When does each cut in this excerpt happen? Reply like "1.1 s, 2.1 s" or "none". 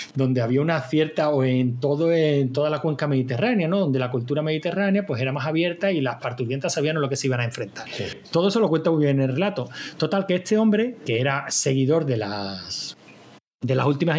7.9 s